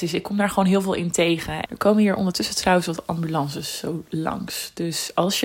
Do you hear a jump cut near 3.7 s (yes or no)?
no